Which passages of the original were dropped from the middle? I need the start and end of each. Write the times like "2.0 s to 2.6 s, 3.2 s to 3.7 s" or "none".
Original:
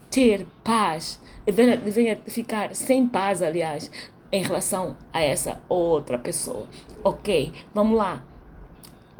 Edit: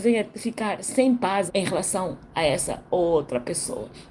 3.4 s to 4.2 s